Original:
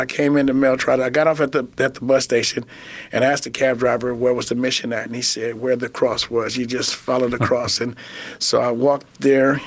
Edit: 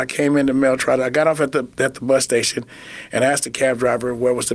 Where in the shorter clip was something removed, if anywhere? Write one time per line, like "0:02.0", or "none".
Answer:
none